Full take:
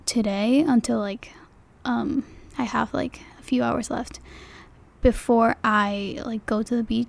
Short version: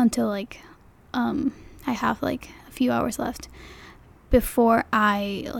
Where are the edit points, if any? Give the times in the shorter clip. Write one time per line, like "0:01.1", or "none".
none